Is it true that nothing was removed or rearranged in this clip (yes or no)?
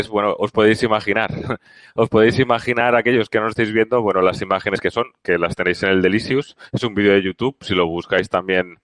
yes